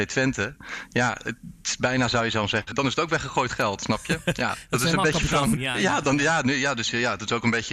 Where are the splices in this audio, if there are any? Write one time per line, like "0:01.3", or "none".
0:02.7
0:05.6